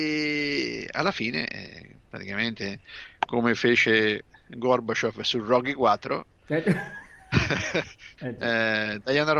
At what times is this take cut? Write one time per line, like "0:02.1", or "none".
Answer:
0:08.2